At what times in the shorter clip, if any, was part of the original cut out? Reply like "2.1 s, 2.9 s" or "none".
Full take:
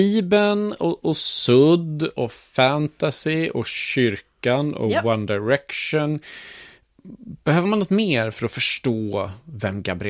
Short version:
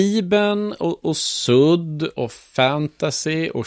none